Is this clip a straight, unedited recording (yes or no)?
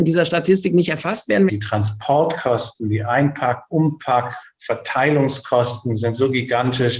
no